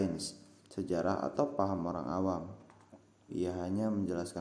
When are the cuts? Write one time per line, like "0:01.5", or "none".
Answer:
0:03.3